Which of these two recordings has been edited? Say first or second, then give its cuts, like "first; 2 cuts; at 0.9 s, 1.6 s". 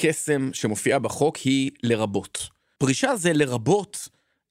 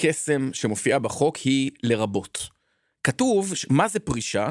first; 1 cut; at 2.8 s